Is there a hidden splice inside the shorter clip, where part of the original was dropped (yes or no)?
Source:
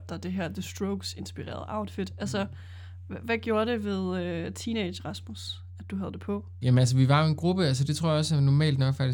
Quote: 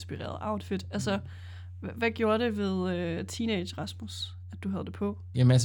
no